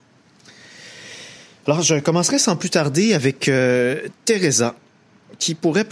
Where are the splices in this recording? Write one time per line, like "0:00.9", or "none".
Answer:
none